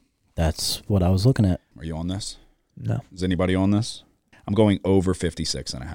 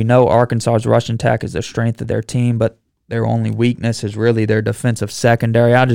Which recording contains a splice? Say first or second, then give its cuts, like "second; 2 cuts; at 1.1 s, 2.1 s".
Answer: first; 2 cuts; at 1.7 s, 4.3 s